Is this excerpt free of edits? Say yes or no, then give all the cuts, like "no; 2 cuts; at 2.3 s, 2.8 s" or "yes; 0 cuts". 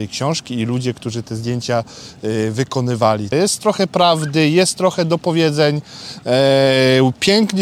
no; 1 cut; at 3.3 s